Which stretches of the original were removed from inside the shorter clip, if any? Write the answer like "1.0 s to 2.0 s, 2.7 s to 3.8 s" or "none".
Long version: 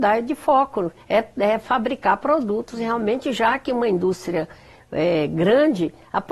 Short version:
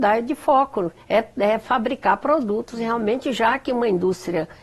none